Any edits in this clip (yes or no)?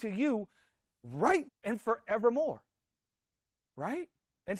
yes